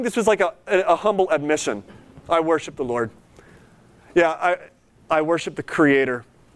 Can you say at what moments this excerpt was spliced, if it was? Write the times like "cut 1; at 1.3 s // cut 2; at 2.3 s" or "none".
none